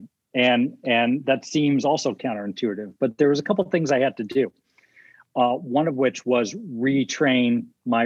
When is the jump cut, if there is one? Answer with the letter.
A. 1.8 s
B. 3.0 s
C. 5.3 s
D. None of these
D